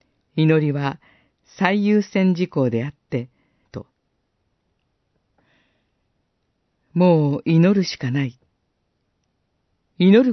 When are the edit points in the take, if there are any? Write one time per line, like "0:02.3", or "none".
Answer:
0:03.6